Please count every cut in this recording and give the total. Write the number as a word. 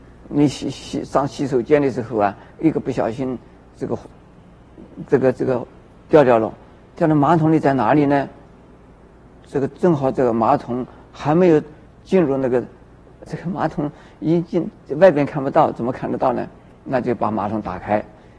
one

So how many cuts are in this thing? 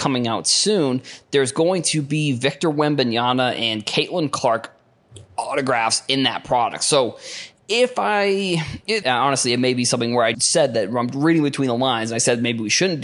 two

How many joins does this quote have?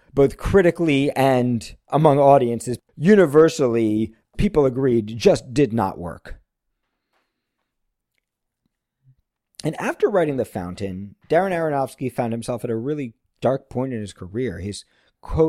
zero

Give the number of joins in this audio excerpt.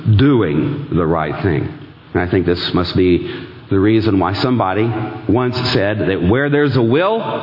one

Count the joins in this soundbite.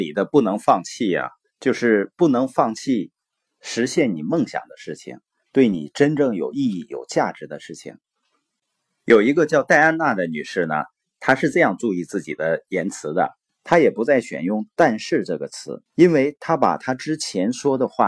two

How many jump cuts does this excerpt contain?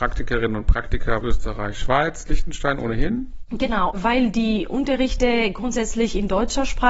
one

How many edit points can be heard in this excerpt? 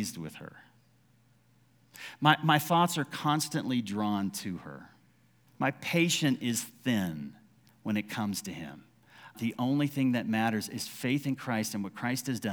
two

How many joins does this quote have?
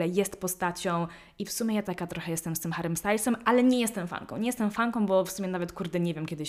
zero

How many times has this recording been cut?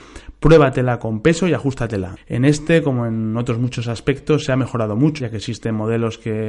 two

